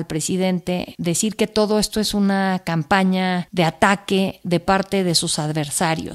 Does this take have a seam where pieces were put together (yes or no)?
no